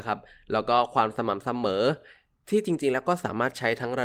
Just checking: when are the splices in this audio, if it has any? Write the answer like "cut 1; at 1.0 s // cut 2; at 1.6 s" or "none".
none